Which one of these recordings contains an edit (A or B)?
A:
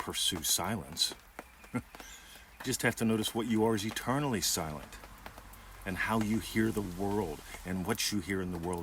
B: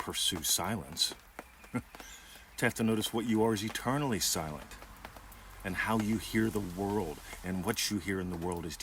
B